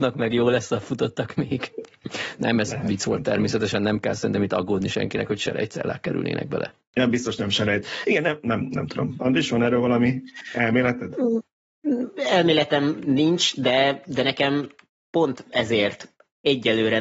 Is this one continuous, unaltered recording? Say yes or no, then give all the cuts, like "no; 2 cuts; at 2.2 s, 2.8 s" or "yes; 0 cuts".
yes; 0 cuts